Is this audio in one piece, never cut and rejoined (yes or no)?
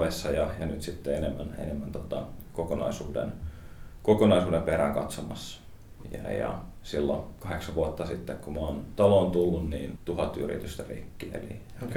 no